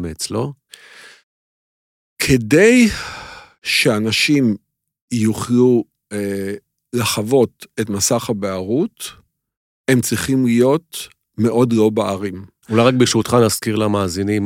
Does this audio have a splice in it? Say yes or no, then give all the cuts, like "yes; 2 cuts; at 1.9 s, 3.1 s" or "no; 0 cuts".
yes; 1 cut; at 12.6 s